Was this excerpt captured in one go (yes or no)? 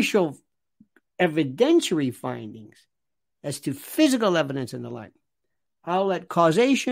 yes